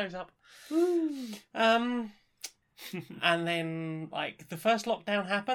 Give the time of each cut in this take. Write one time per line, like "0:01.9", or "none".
0:02.6